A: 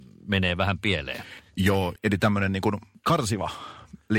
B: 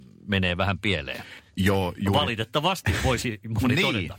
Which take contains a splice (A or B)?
A